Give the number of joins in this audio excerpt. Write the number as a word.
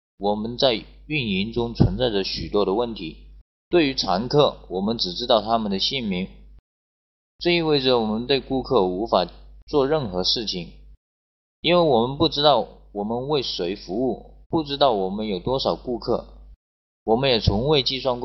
two